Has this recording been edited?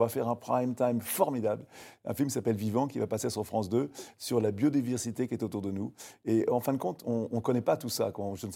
no; 0 cuts

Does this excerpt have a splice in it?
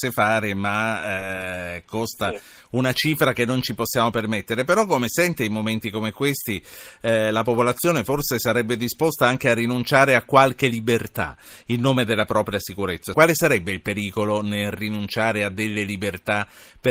yes; 1 cut; at 13.1 s

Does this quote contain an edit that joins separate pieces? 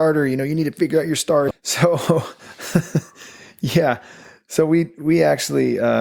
yes; 1 cut; at 1.5 s

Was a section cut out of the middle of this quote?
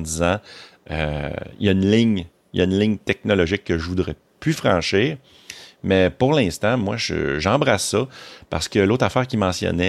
no; 0 cuts

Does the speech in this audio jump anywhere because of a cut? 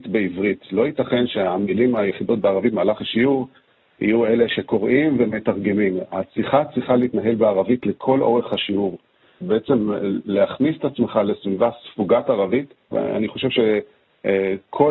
yes; 2 cuts; at 9.4 s, 12.9 s

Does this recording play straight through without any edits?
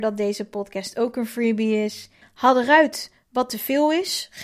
no; 1 cut; at 2.2 s

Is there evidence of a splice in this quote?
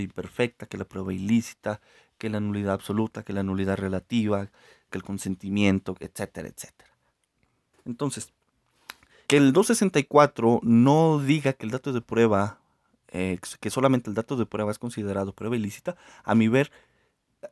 yes; 3 cuts; at 4.9 s, 7.7 s, 9.3 s

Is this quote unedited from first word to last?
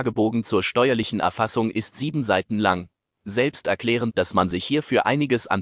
no; 1 cut; at 4.1 s

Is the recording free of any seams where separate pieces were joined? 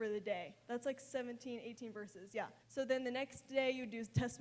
no; 1 cut; at 2.6 s

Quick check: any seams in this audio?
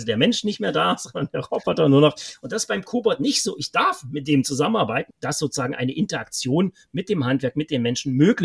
yes; 1 cut; at 5.1 s

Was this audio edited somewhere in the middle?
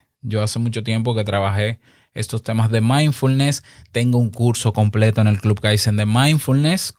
no; 0 cuts

